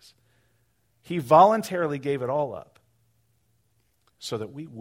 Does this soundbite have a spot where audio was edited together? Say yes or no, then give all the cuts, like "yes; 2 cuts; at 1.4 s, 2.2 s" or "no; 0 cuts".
no; 0 cuts